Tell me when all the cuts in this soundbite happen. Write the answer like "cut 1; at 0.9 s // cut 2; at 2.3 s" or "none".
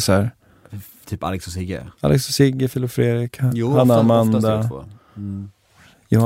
none